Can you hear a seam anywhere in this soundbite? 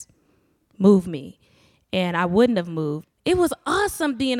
yes; 1 cut; at 3.0 s

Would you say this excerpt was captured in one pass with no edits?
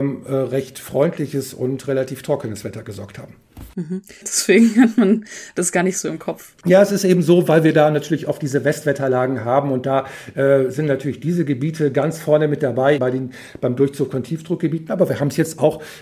no; 3 cuts; at 4.2 s, 6.6 s, 13.0 s

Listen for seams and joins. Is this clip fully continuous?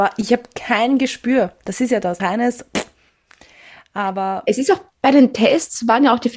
no; 1 cut; at 2.2 s

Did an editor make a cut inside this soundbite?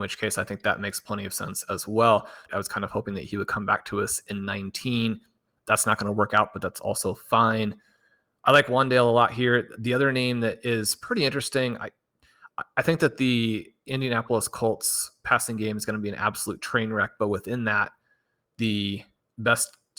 yes; 1 cut; at 2.5 s

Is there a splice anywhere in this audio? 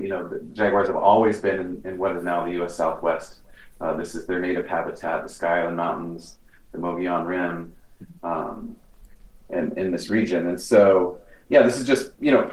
no; 0 cuts

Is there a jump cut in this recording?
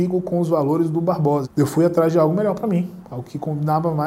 yes; 1 cut; at 1.4 s

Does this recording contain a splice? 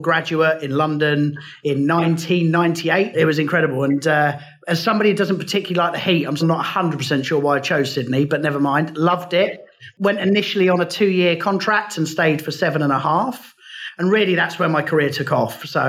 yes; 2 cuts; at 3.1 s, 6.4 s

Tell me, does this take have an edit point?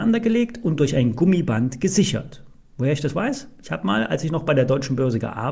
no; 0 cuts

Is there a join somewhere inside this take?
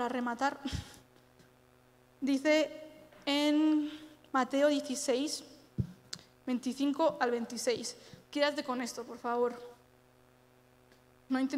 no; 0 cuts

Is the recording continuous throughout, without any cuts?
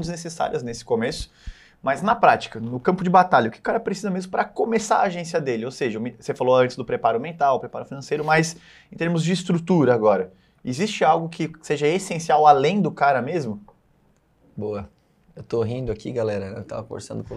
yes; 0 cuts

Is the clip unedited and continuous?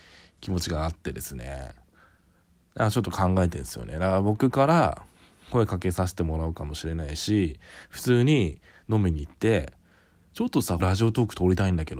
no; 1 cut; at 10.8 s

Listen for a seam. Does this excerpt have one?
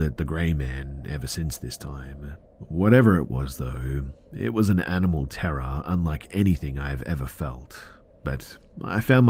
yes; 1 cut; at 2.5 s

